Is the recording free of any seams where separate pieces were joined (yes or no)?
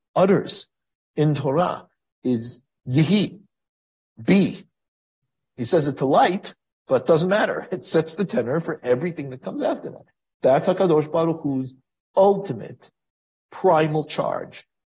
yes